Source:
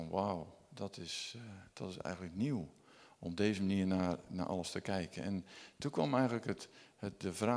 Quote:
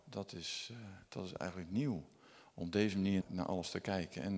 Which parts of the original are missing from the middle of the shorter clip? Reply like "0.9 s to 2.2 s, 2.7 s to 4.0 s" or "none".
3.9 s to 4.2 s

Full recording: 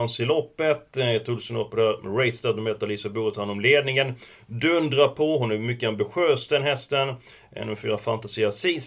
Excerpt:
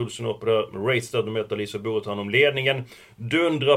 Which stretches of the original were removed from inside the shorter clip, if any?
none

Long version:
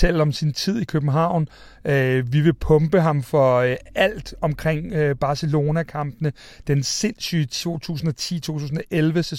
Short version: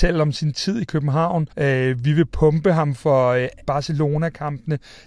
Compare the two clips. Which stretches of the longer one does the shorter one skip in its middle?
1.5 s to 1.8 s, 3.9 s to 5.2 s

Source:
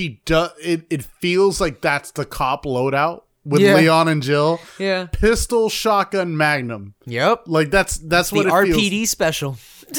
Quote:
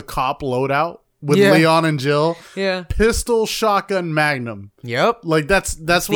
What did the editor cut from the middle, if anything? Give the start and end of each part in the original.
none

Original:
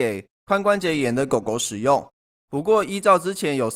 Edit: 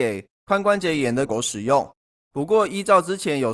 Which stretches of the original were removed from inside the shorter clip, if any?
1.3 s to 1.4 s

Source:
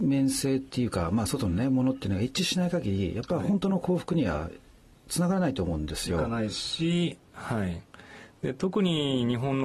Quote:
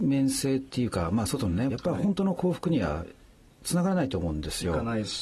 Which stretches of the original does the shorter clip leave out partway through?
1.7 s to 3.1 s

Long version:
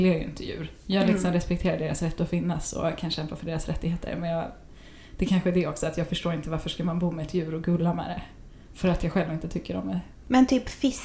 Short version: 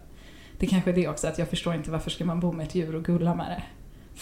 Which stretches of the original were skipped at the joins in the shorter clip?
none

